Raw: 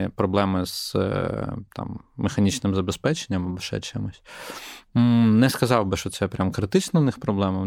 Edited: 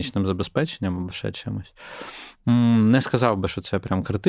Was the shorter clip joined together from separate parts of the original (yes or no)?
no